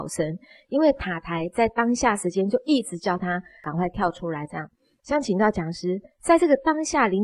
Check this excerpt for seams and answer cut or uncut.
cut